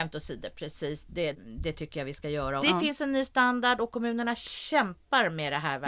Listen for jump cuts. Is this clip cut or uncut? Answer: cut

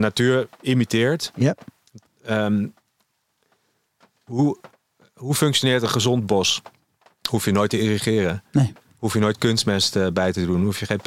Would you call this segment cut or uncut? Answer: uncut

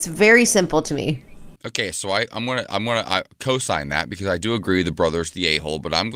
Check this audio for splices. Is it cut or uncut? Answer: cut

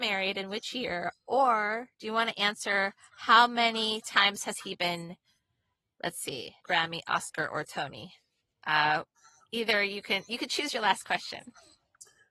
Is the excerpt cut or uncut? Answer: cut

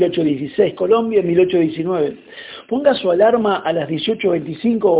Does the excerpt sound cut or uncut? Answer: uncut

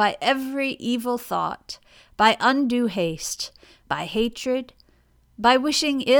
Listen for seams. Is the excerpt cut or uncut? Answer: cut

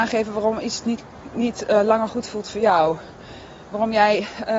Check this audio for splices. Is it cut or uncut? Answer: uncut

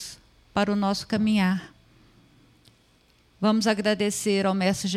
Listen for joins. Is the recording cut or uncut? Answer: uncut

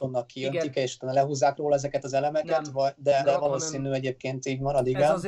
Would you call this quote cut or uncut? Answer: cut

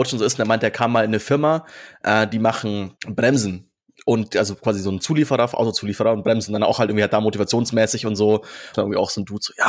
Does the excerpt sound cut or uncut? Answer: cut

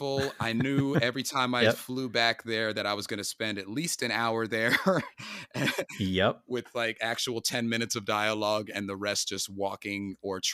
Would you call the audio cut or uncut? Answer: uncut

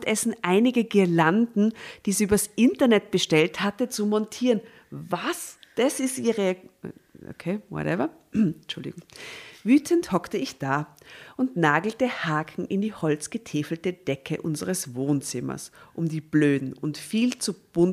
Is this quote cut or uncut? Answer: uncut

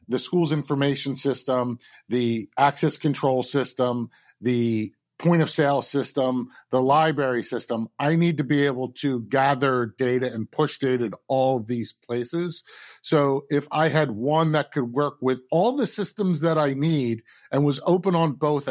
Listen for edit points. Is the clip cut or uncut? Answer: uncut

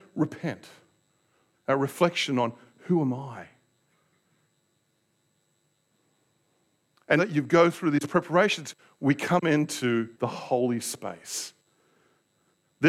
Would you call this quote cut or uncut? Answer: cut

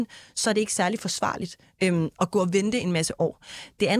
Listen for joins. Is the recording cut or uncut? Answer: uncut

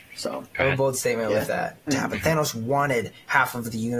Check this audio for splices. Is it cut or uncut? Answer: cut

